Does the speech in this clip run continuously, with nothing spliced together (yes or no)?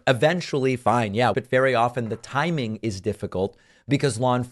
no